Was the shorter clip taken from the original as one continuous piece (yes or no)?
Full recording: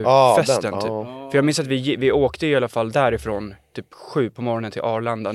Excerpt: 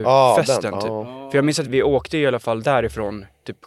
no